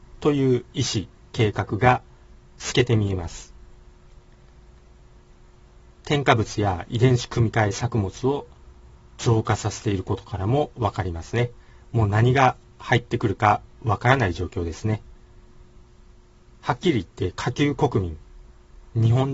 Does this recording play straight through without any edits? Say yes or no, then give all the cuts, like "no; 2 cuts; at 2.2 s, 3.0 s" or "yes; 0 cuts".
yes; 0 cuts